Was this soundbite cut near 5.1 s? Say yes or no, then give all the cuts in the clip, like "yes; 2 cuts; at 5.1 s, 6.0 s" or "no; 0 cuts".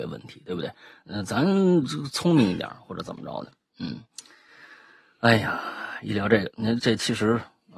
no; 1 cut; at 6.8 s